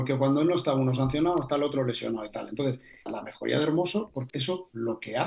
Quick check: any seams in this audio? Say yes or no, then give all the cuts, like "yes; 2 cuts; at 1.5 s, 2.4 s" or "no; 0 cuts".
yes; 2 cuts; at 3.1 s, 4.3 s